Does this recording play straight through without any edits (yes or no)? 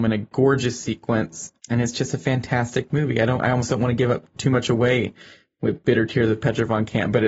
yes